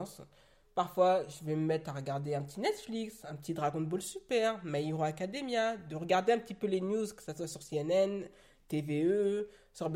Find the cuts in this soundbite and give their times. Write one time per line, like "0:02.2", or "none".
none

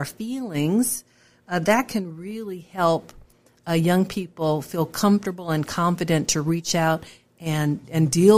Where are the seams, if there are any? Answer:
none

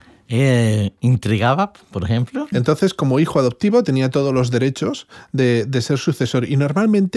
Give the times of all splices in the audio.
0:02.5

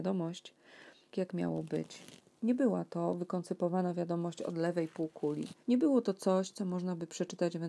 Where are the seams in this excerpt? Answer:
0:01.1
0:05.6

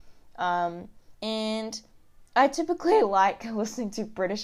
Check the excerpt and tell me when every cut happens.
0:01.1

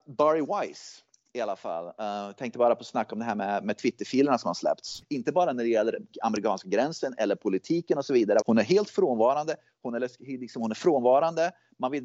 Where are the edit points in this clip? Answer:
0:05.0
0:08.4

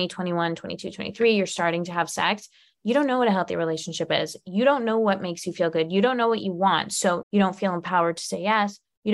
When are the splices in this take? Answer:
0:07.2

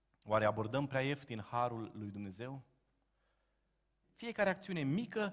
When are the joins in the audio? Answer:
0:04.0

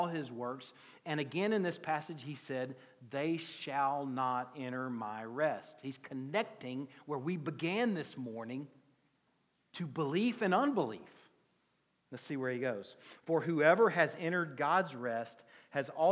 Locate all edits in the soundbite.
0:12.0
0:13.2

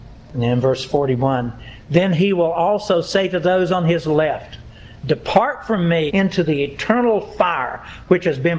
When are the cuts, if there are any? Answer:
0:06.1

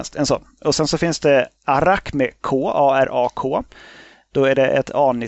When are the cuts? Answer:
0:01.6

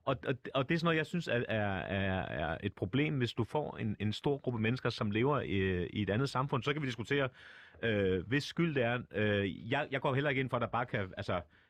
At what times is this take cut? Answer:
0:02.2

